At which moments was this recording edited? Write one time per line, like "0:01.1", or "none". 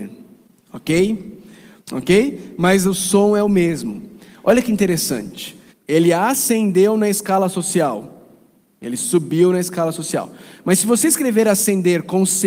0:01.8
0:05.7